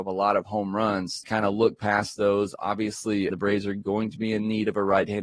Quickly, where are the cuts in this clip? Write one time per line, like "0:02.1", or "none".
0:01.2
0:03.3